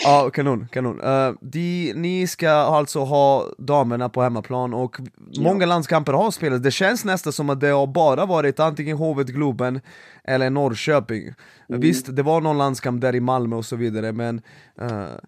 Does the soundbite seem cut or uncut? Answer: uncut